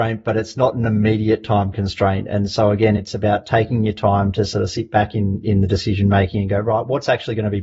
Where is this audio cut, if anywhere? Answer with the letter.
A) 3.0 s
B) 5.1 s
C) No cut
C